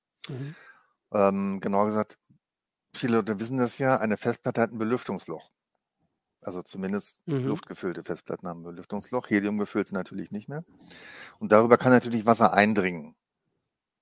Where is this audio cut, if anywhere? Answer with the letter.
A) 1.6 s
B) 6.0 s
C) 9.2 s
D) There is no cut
D